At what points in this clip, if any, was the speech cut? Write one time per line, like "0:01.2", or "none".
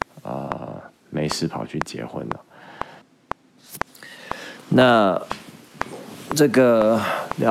0:01.0

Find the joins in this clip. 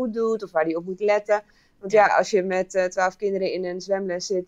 none

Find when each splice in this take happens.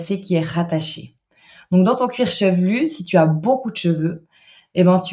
none

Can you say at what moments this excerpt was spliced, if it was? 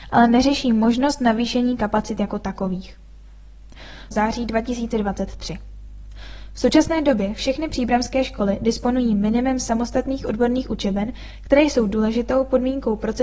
0:04.1

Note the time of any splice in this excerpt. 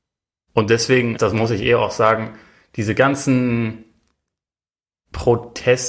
0:01.2

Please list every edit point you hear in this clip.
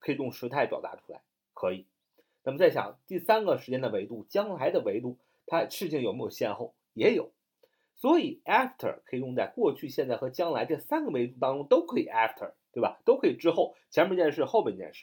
none

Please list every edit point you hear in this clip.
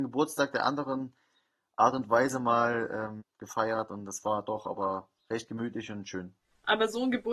0:03.2

